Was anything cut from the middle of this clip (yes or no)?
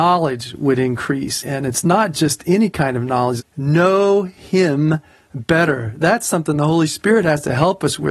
yes